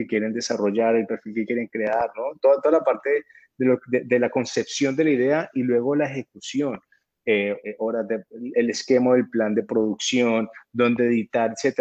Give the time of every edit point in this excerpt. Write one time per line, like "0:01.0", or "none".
0:07.6

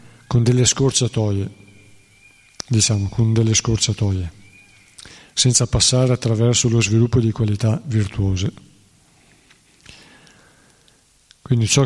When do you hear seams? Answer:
none

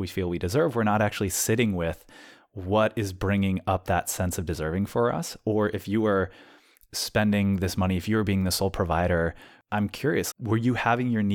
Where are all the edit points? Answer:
0:10.3

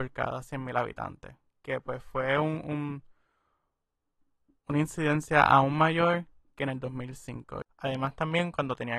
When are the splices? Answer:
0:07.7

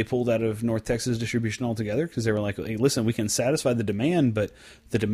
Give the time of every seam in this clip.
none

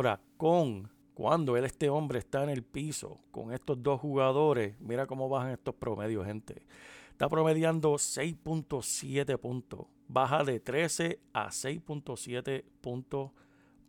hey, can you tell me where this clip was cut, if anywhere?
none

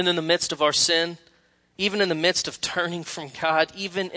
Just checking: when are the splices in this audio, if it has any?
none

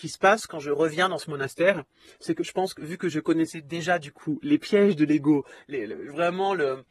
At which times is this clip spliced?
none

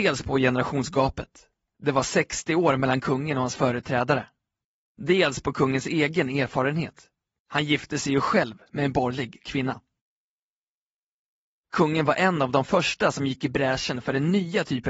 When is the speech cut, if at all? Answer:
none

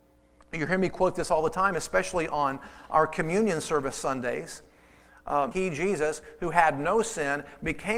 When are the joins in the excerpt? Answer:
0:05.5

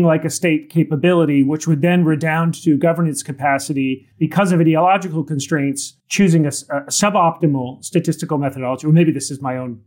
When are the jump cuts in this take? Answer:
0:04.1
0:06.0

